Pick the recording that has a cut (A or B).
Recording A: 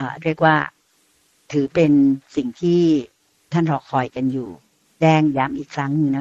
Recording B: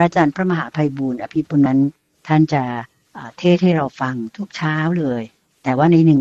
B